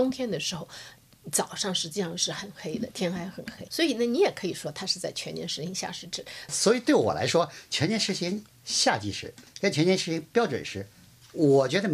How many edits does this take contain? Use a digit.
2